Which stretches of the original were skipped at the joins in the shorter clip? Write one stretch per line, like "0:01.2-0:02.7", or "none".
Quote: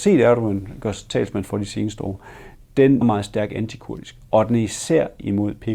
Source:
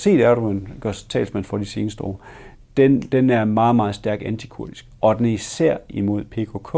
0:03.0-0:03.7